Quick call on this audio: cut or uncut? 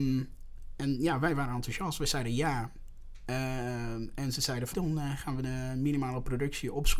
cut